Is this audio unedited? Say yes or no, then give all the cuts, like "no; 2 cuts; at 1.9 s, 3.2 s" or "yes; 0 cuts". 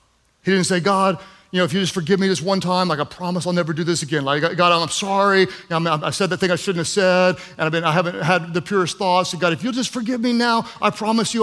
yes; 0 cuts